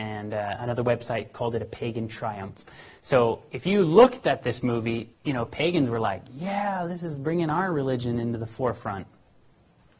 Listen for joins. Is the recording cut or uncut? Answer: cut